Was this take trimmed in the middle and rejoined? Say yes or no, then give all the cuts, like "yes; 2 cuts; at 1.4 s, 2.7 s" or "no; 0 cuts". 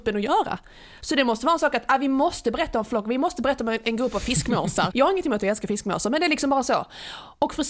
yes; 1 cut; at 4.9 s